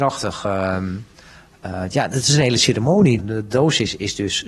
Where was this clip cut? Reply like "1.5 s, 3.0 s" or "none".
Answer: 3.2 s